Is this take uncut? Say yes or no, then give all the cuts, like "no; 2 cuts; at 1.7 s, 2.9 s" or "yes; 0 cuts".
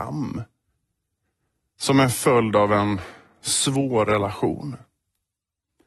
yes; 0 cuts